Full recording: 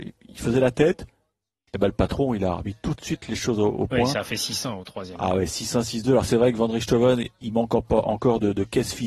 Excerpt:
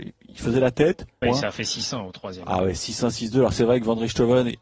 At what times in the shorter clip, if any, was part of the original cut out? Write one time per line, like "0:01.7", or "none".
0:01.2